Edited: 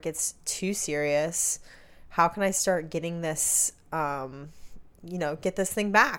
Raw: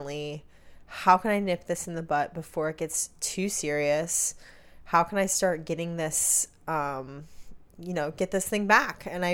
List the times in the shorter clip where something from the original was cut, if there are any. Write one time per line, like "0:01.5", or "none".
none